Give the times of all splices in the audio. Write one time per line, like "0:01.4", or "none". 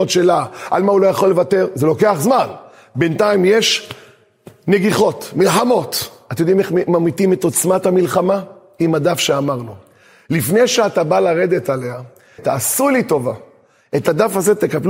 0:12.4